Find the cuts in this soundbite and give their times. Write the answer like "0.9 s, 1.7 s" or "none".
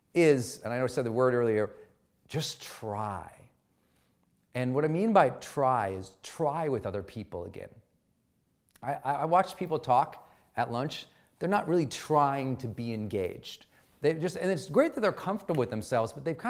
13.9 s